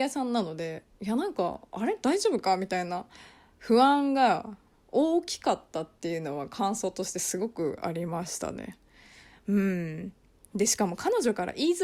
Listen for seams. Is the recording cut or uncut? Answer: uncut